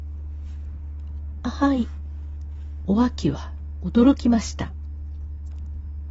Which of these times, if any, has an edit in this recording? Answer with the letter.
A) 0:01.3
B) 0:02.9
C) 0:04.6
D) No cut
B